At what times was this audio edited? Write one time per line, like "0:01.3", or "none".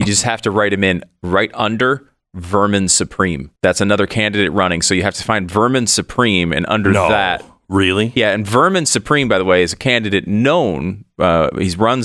0:03.6